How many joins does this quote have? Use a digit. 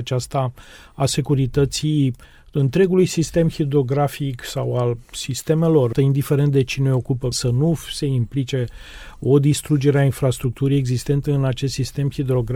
2